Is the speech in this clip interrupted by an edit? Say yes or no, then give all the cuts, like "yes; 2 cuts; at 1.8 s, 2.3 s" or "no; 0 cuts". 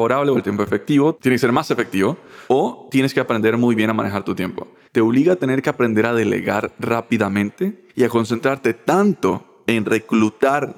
yes; 2 cuts; at 4.9 s, 7.9 s